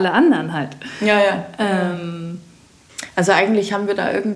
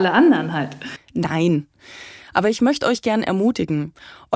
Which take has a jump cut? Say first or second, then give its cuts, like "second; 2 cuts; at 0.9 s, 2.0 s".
second; 1 cut; at 1.0 s